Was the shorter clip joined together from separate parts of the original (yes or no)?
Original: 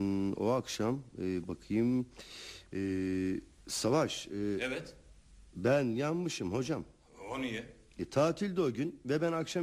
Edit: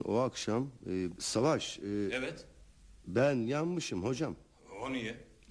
yes